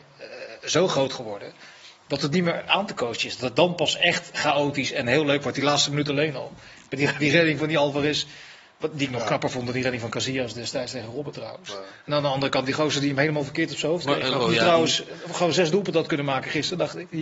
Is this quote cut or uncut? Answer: cut